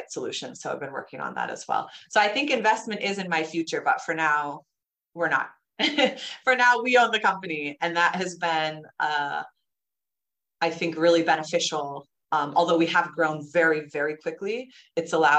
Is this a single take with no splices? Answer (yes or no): yes